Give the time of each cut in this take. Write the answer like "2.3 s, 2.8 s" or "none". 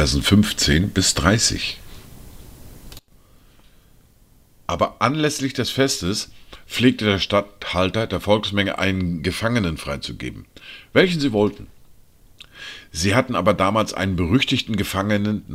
none